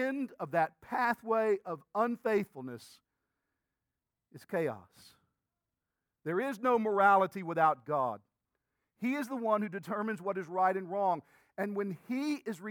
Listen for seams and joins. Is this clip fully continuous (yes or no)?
yes